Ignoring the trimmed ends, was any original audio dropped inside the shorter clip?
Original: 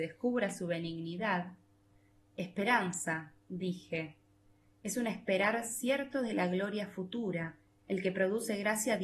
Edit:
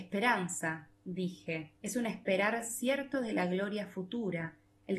yes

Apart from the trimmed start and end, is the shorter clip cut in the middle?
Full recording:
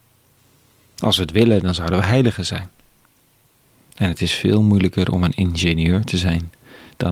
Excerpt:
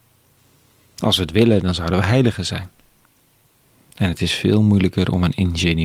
no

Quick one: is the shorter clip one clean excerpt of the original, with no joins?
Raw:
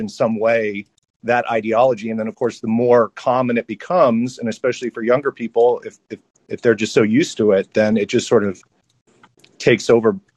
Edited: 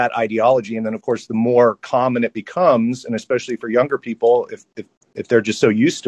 yes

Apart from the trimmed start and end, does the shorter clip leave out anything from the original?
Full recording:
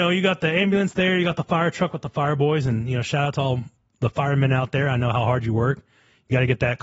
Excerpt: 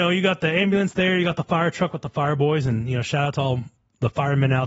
no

